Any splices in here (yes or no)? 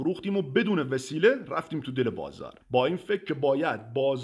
yes